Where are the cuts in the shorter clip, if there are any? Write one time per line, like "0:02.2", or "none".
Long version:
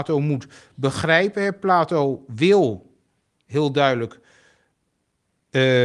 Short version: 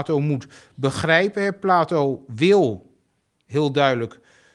none